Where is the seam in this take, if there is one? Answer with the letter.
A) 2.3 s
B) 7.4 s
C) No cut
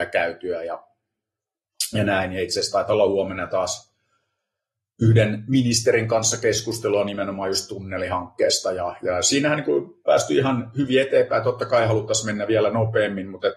C